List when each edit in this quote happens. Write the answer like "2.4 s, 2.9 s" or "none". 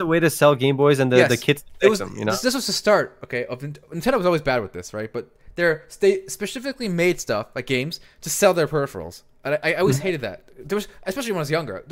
none